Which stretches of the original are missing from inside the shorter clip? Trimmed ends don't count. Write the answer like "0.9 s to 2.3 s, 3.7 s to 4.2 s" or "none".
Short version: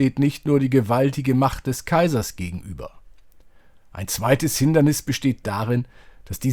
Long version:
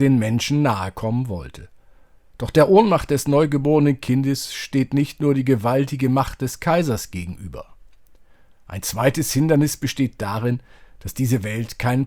none